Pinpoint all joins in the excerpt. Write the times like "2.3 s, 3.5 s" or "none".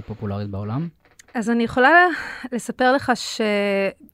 none